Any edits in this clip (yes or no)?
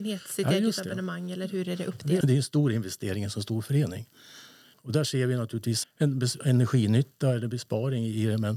yes